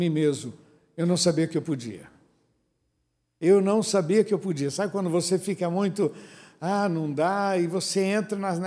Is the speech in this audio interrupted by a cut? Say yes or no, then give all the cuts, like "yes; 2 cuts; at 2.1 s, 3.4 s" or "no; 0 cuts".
no; 0 cuts